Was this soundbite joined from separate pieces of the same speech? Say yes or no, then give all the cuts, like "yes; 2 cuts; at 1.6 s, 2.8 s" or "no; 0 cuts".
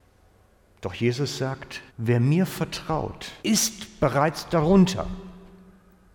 yes; 2 cuts; at 1.9 s, 3.4 s